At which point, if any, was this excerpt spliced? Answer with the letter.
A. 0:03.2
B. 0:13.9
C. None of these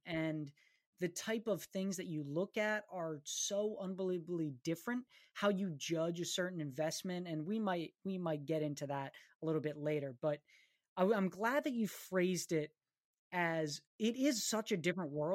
B